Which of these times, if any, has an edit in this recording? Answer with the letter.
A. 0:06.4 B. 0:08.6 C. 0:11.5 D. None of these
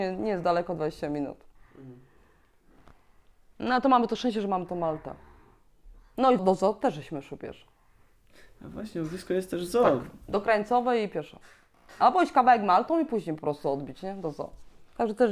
A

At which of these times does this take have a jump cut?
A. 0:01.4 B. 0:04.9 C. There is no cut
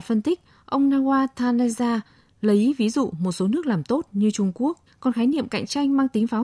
B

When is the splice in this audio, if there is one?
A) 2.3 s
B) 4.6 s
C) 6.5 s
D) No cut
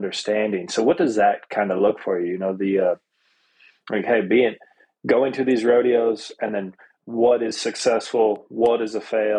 D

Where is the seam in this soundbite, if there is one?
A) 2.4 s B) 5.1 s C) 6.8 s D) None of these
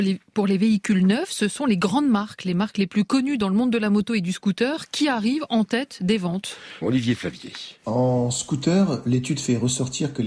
C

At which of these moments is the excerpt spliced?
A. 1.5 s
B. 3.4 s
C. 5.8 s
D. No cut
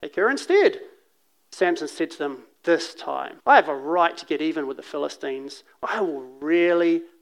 B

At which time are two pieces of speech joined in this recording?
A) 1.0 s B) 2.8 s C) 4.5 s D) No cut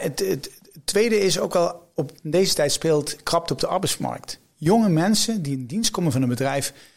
D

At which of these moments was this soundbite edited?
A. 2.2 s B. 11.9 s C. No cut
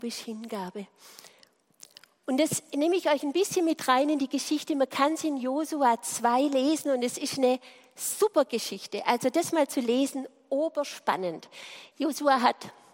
B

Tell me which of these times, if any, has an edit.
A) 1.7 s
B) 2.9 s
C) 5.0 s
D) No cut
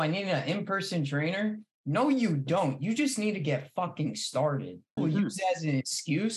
C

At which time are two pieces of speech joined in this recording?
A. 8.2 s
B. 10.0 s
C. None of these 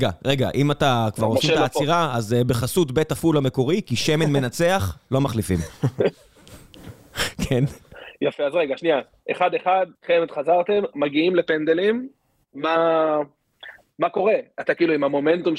B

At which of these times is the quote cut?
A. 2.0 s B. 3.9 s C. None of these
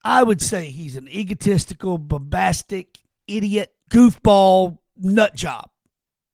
B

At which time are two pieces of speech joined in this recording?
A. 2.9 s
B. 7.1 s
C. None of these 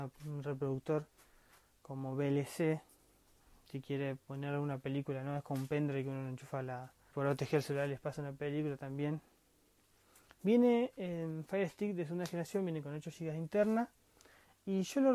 B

